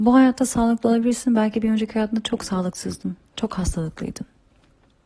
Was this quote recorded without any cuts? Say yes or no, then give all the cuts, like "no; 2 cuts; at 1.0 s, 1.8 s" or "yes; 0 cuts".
yes; 0 cuts